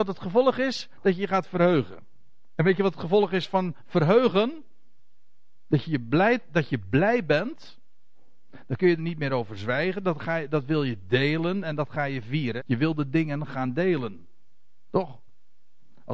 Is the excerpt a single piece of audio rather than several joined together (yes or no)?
no